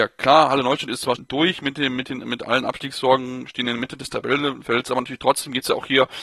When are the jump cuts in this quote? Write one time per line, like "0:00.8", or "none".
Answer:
0:01.1